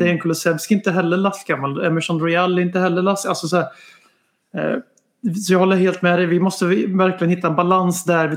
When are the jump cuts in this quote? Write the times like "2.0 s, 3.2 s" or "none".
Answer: none